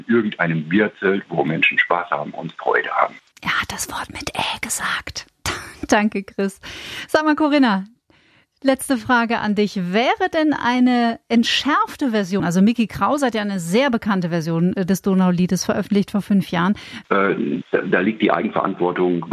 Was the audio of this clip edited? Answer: yes; 2 cuts; at 12.4 s, 17.0 s

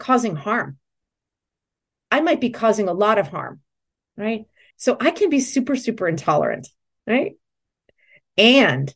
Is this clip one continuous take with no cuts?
no; 1 cut; at 4.7 s

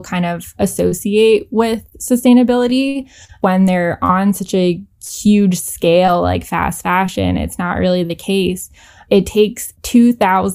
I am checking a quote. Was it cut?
no; 0 cuts

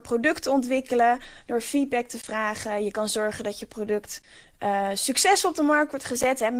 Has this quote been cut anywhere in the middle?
no; 0 cuts

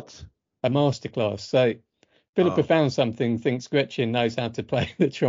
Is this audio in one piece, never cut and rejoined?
yes; 0 cuts

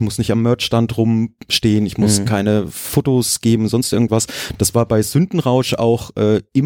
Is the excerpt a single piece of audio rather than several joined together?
yes; 0 cuts

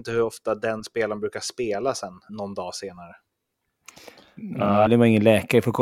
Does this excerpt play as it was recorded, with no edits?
no; 2 cuts; at 2.3 s, 4.9 s

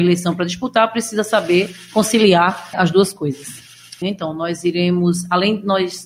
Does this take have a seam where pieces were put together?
yes; 2 cuts; at 2.7 s, 4.0 s

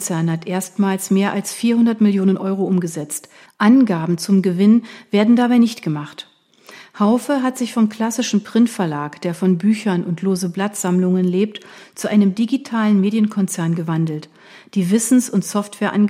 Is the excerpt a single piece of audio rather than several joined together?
no; 1 cut; at 3.5 s

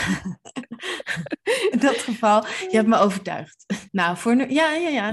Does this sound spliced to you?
yes; 2 cuts; at 1.7 s, 3.9 s

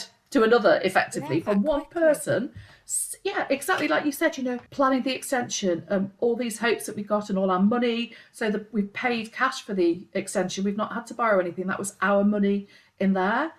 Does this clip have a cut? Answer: yes; 1 cut; at 4.7 s

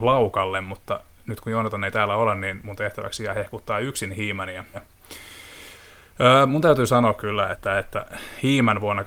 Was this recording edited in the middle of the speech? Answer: yes; 2 cuts; at 4.7 s, 7.5 s

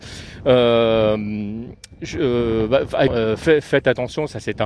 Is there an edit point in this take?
yes; 1 cut; at 3.1 s

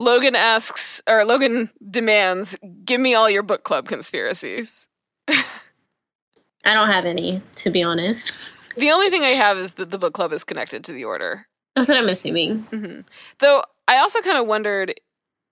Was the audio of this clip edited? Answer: yes; 1 cut; at 11.6 s

